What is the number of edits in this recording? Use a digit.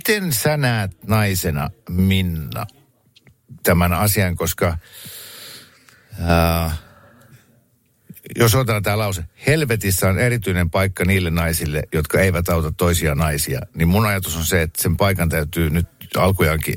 0